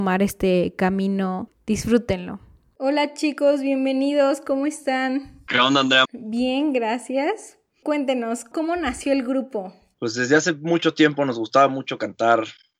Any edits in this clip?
yes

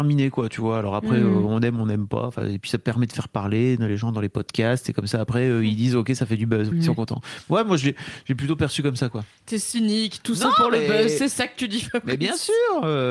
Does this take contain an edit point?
yes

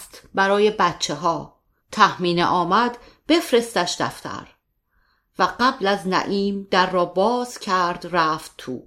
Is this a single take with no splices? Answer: no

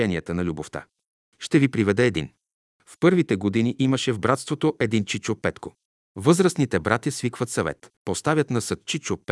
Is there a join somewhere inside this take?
yes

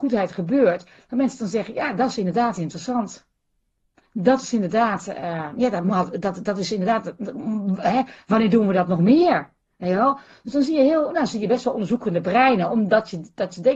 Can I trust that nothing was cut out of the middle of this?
yes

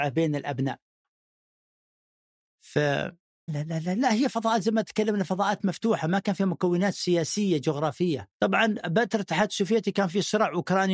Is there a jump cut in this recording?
yes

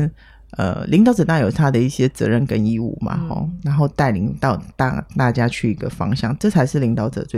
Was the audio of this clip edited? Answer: no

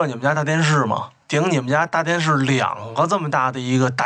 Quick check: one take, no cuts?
no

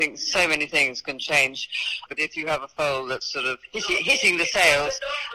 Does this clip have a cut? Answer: yes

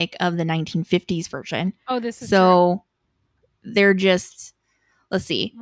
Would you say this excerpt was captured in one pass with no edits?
yes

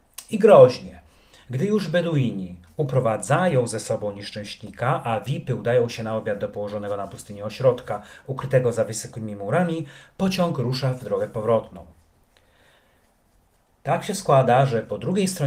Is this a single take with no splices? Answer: yes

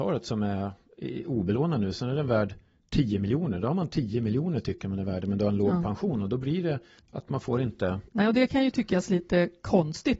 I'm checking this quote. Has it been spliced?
yes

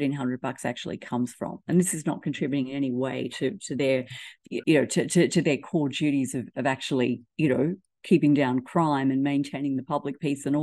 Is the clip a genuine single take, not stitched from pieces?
no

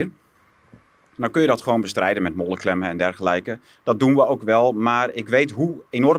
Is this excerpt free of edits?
yes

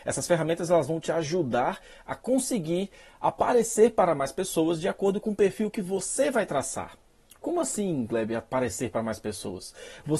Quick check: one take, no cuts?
yes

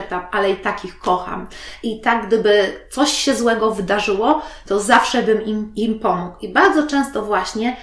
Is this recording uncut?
yes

